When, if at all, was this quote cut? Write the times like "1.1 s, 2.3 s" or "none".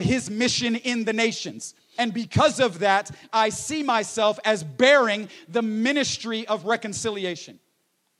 2.0 s